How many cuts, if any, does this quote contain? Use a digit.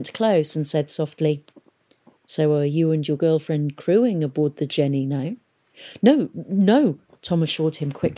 0